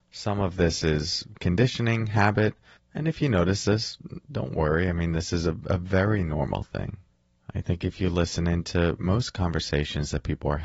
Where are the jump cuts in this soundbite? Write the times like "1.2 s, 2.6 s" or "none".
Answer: 2.8 s